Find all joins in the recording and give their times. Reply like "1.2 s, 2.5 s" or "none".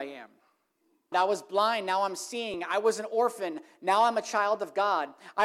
1.1 s